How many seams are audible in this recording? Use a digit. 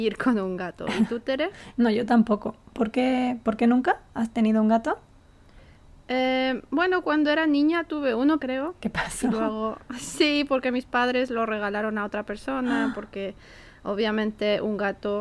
1